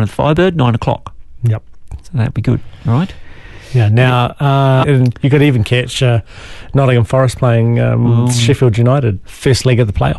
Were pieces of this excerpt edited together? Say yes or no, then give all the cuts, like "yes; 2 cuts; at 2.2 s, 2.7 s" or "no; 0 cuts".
yes; 2 cuts; at 4.8 s, 9.2 s